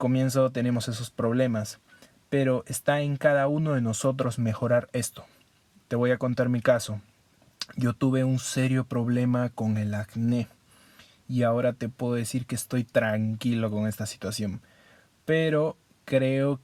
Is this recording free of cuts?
yes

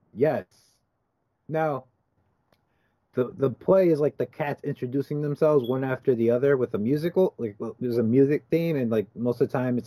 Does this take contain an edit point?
yes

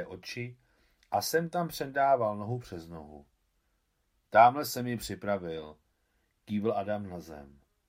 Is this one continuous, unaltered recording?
no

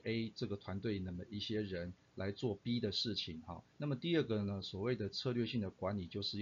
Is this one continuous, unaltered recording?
no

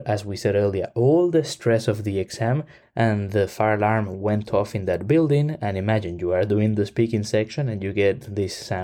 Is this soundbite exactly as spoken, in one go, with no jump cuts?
no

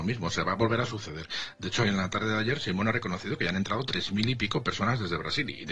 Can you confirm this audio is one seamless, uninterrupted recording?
yes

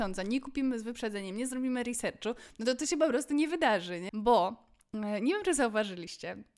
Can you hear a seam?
yes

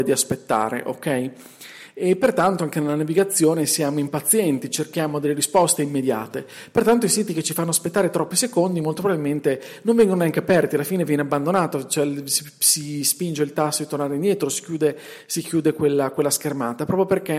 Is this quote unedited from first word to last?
yes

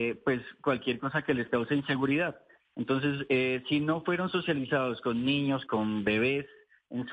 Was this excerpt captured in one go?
no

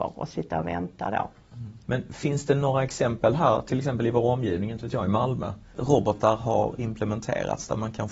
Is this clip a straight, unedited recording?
no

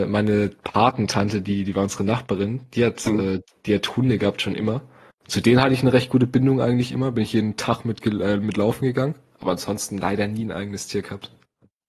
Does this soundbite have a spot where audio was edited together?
no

